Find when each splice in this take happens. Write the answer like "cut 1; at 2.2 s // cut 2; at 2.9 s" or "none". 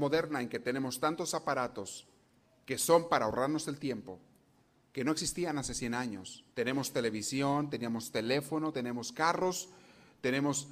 cut 1; at 6.5 s // cut 2; at 8.7 s